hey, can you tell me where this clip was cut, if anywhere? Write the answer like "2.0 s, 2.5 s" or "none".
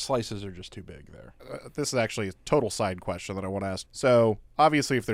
1.4 s, 3.8 s